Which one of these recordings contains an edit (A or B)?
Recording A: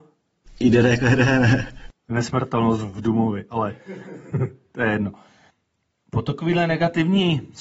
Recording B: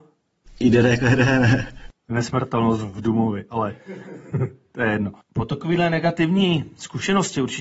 B